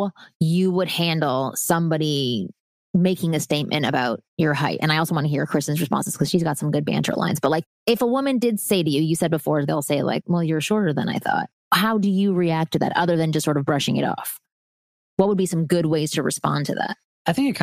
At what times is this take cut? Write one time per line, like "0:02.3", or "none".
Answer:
0:10.2